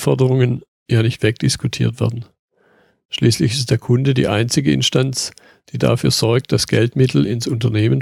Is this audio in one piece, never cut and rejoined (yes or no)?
yes